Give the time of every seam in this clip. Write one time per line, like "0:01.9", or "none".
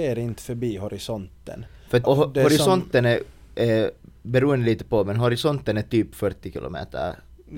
0:02.0

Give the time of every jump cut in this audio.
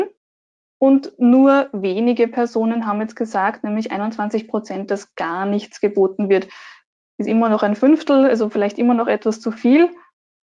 none

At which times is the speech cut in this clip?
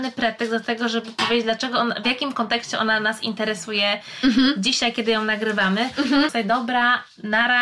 0:06.3

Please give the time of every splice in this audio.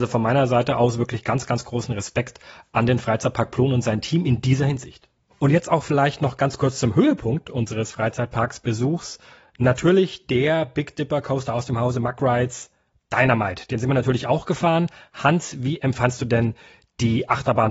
none

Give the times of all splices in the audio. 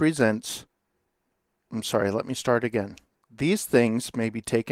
none

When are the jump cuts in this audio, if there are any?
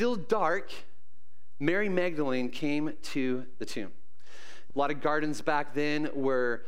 0:04.7

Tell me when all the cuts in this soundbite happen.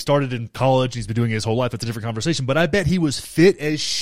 none

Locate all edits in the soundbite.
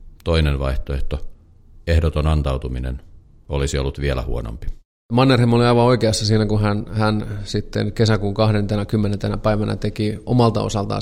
none

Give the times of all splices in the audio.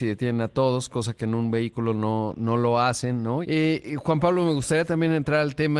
0:03.4

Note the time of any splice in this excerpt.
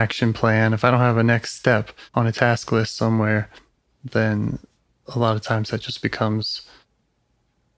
0:02.1

